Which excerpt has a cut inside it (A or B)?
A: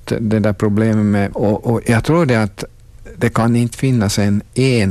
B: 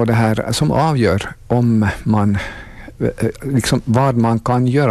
A